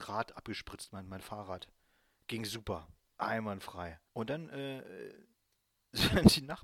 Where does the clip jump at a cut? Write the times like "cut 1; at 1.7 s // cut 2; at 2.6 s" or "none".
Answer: cut 1; at 4.1 s